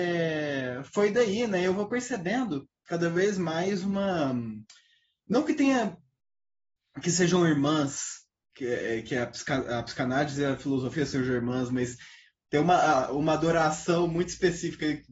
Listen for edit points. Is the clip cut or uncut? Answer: uncut